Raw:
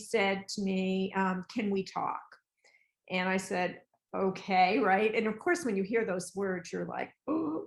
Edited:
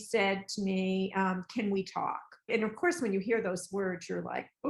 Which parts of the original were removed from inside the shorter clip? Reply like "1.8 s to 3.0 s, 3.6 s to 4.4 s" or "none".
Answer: 2.5 s to 5.1 s